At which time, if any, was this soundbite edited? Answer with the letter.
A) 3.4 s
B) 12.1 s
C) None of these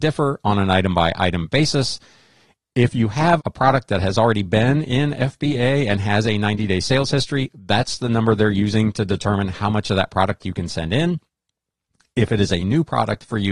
A